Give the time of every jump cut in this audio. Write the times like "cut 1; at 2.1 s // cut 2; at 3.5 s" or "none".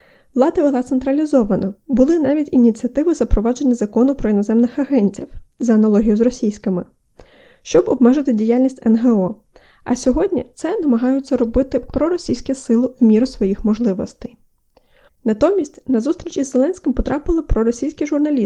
cut 1; at 15.1 s

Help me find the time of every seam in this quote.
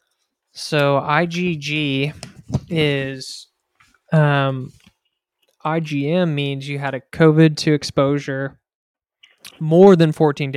cut 1; at 4.1 s // cut 2; at 7.1 s

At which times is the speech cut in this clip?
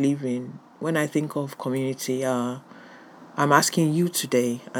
none

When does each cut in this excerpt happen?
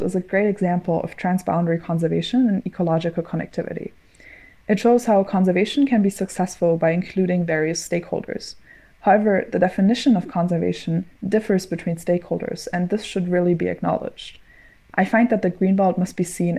cut 1; at 14.9 s

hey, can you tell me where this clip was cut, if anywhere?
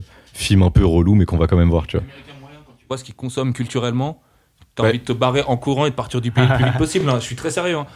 none

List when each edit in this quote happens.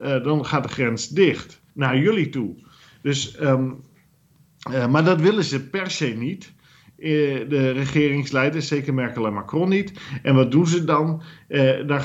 cut 1; at 1.7 s

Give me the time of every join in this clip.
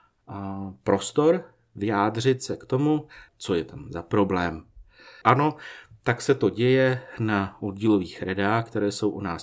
cut 1; at 3.3 s // cut 2; at 5.2 s

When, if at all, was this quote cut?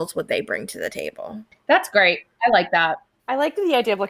cut 1; at 3.2 s

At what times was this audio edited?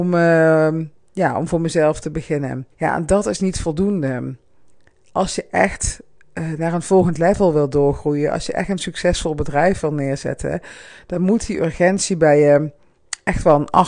cut 1; at 2.7 s

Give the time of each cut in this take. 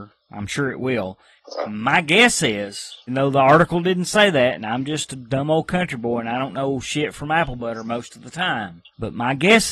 cut 1; at 3.1 s

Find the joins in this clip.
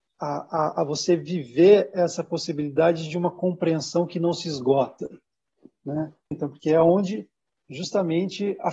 cut 1; at 6.3 s

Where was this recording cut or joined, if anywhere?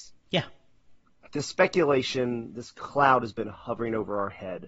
none

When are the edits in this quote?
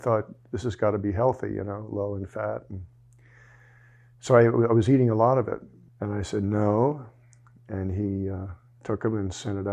cut 1; at 5.9 s

